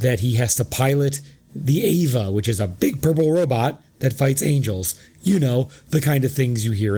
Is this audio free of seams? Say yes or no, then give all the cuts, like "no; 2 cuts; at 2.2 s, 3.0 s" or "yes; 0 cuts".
yes; 0 cuts